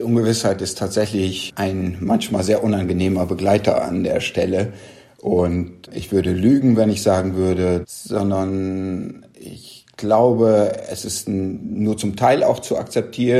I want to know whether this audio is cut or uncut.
cut